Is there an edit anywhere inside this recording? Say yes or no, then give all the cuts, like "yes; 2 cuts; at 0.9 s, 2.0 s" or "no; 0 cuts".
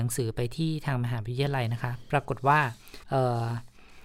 yes; 1 cut; at 3.0 s